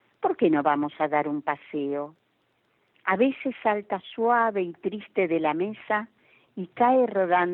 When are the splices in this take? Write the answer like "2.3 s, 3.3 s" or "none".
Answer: 2.9 s